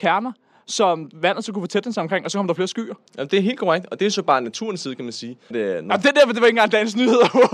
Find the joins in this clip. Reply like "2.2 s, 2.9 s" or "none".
5.5 s

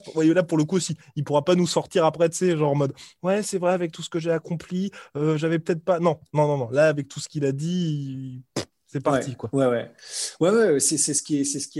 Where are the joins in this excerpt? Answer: none

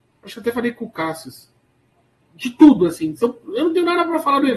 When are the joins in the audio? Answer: 2.2 s

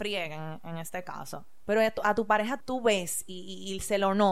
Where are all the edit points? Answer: 2.6 s

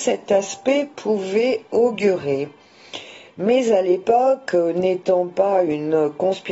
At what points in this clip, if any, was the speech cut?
none

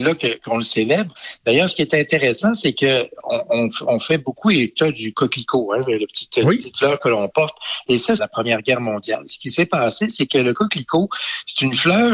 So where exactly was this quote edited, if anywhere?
8.2 s

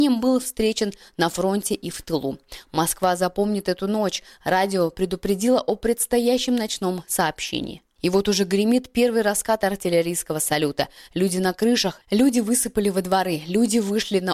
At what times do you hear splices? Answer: none

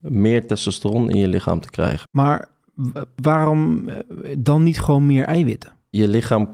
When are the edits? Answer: none

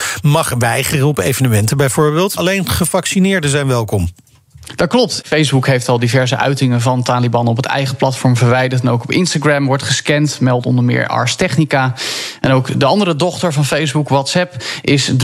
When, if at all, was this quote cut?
2.4 s, 5.2 s

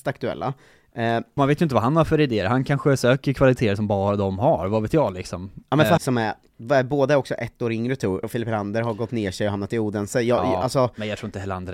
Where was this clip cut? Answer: 1.4 s, 6.0 s, 8.2 s

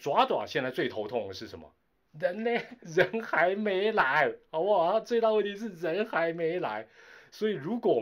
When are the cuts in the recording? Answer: 2.8 s

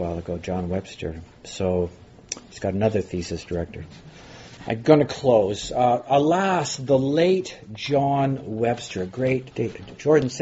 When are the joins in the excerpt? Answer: 4.6 s, 9.5 s

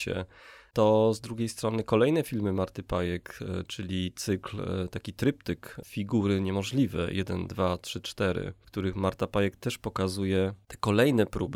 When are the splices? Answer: none

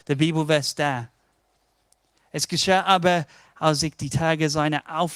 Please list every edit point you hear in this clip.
none

